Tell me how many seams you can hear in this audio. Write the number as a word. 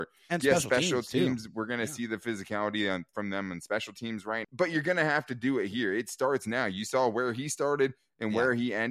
one